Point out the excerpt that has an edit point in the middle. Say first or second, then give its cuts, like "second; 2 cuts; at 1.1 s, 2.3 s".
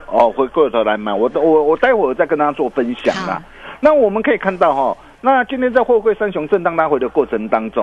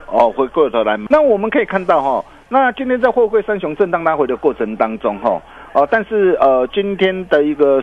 second; 1 cut; at 1.1 s